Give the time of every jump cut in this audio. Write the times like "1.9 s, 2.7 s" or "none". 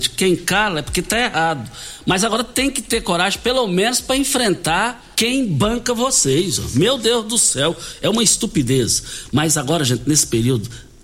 5.1 s